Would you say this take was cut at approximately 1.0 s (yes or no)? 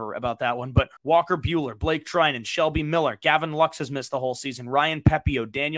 yes